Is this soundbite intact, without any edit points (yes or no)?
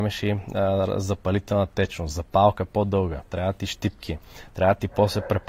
yes